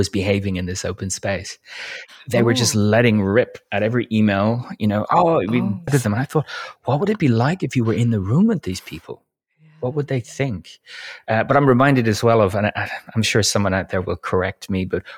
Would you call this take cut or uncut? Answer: cut